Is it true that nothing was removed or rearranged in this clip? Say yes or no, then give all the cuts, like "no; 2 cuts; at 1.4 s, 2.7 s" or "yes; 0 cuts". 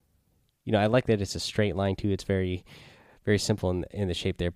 yes; 0 cuts